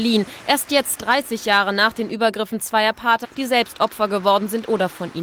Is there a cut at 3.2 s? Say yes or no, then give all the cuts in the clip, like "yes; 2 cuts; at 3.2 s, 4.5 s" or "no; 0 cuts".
yes; 1 cut; at 3.2 s